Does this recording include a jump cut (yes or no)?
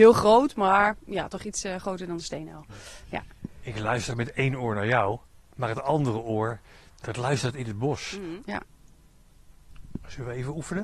yes